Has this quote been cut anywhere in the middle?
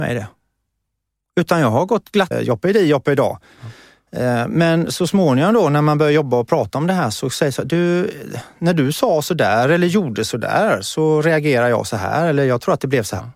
yes; 1 cut; at 2.3 s

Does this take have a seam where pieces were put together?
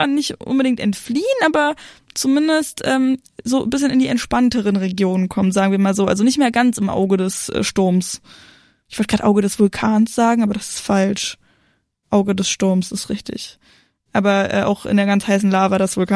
no; 0 cuts

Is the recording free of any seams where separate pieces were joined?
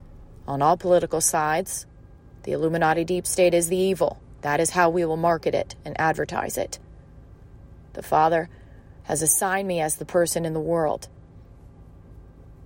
yes; 0 cuts

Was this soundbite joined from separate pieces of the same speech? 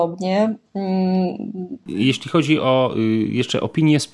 yes; 1 cut; at 1.8 s

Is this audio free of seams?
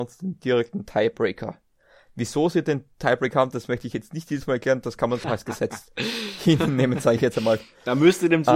no; 1 cut; at 5.2 s

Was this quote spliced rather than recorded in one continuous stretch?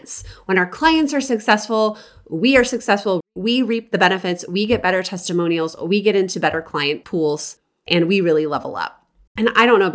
no; 0 cuts

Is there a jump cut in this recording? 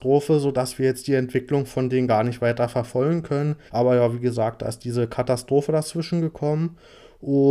yes; 1 cut; at 3.7 s

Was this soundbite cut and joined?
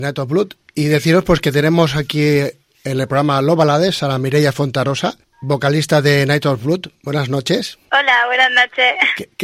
no; 0 cuts

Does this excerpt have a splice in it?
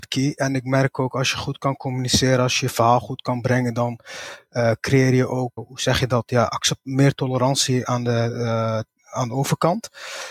yes; 1 cut; at 5.6 s

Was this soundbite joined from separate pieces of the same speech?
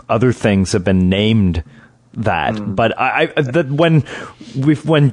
no; 0 cuts

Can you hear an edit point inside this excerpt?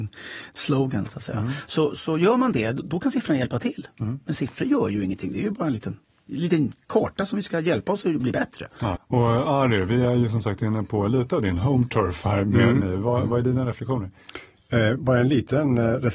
yes; 2 cuts; at 9.0 s, 12.8 s

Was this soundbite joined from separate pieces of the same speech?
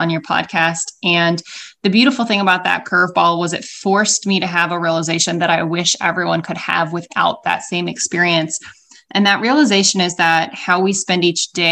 no; 0 cuts

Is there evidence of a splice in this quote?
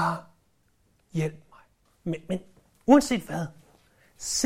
yes; 1 cut; at 1.9 s

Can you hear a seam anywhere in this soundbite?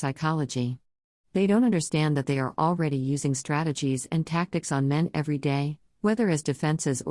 no; 0 cuts

